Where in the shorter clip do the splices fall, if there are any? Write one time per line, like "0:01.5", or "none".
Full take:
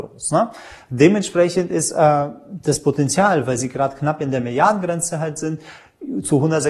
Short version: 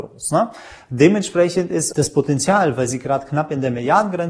0:01.9